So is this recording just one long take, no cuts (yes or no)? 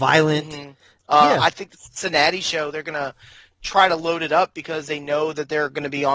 no